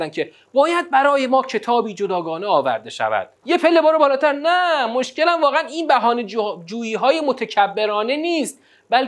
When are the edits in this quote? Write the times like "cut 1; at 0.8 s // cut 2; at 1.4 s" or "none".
cut 1; at 3.4 s